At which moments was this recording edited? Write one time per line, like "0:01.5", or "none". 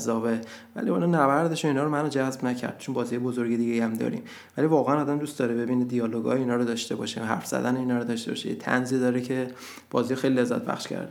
none